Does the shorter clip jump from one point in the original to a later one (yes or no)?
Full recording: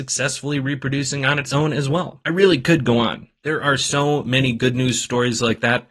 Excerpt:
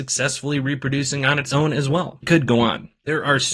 yes